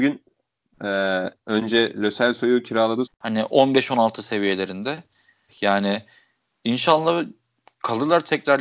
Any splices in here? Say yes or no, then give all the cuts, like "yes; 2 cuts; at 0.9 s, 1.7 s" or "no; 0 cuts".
yes; 2 cuts; at 3.1 s, 5.5 s